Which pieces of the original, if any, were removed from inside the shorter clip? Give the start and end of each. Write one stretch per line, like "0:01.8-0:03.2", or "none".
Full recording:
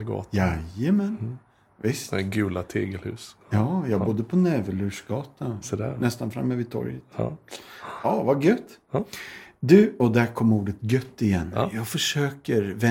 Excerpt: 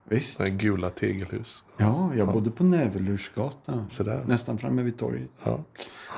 none